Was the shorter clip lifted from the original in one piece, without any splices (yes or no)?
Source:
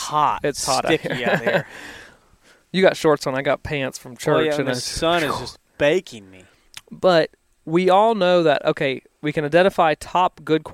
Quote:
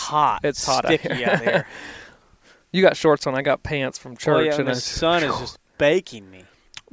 yes